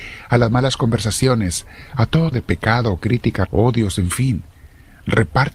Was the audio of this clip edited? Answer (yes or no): yes